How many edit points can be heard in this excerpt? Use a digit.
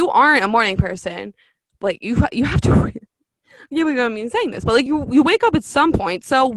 0